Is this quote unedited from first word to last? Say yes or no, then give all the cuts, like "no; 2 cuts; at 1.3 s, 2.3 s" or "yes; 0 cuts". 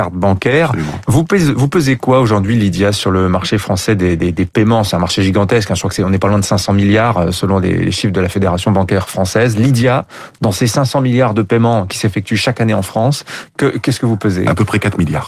no; 1 cut; at 1.0 s